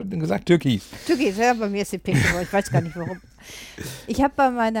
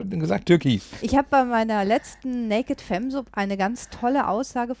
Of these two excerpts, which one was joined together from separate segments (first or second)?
second